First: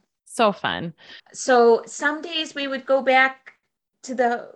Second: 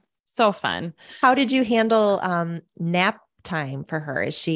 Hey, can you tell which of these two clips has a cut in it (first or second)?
first